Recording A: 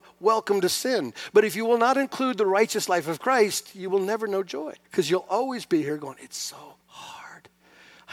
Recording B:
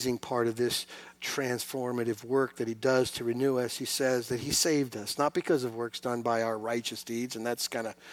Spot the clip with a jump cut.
A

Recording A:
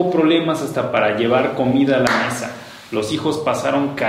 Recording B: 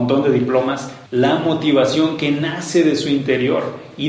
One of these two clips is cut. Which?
B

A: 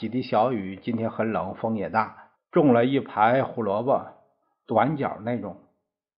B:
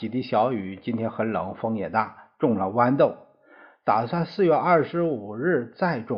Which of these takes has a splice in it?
A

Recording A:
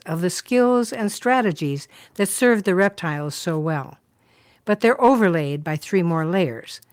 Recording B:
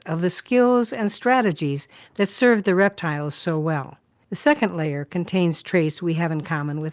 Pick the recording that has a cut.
B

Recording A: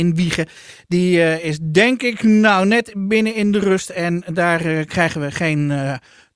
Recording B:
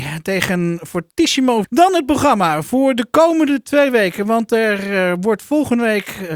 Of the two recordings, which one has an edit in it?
B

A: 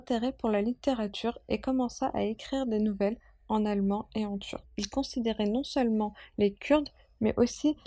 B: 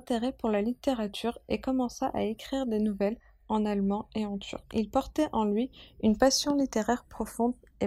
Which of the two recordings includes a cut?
A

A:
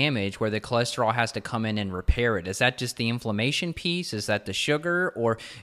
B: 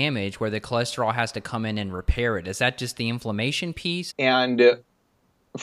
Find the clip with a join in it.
B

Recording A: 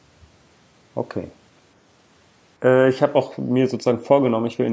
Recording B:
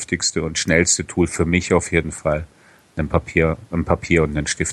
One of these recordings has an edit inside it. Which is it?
A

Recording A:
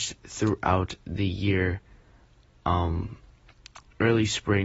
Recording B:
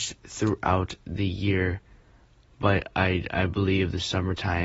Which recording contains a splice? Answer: B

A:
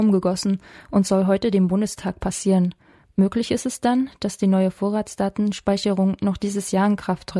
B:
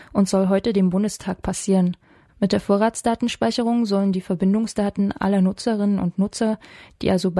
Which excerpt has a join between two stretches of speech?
B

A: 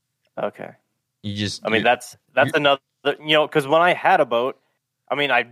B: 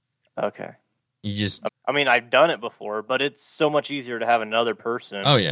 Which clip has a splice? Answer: B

